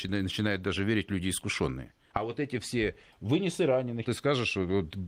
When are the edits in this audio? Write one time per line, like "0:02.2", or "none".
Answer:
0:02.1
0:04.0